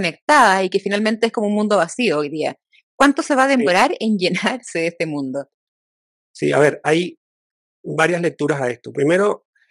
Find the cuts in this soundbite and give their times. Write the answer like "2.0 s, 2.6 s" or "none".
none